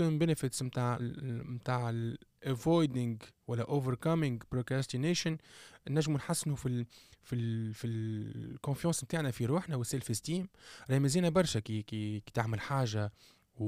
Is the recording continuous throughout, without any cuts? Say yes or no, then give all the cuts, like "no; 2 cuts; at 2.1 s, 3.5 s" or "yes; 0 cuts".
no; 2 cuts; at 1.0 s, 12.2 s